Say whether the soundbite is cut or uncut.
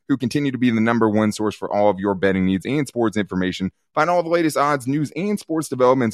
uncut